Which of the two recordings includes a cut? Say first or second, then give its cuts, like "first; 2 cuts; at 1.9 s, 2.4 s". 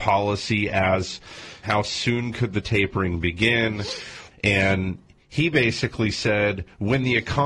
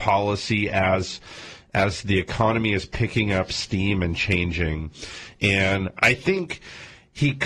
first; 2 cuts; at 1.6 s, 4.3 s